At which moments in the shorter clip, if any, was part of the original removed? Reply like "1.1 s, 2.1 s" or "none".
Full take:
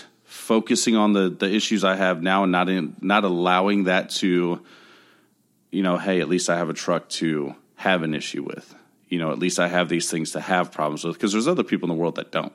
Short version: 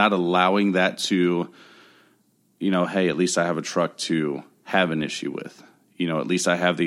none